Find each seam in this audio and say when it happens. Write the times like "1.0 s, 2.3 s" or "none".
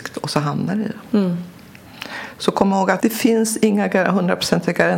3.0 s